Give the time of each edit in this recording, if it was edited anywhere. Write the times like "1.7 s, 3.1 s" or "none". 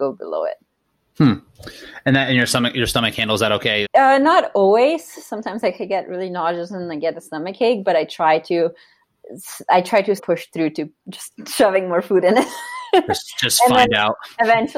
3.8 s, 10.2 s